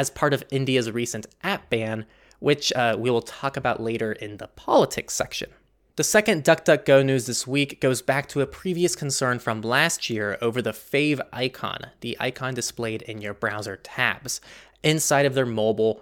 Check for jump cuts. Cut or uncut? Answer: uncut